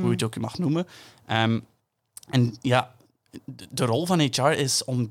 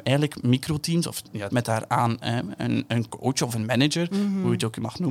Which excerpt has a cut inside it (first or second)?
second